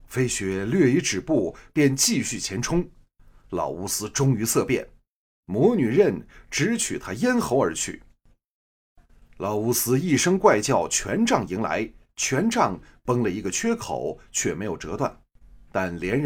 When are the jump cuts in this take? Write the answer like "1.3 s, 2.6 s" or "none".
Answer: 12.1 s